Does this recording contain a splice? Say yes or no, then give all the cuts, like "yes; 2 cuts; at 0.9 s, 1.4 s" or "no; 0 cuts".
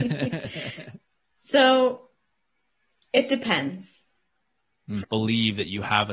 yes; 1 cut; at 5.0 s